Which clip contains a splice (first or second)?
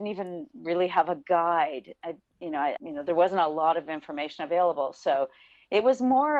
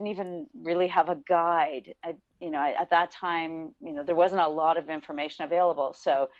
first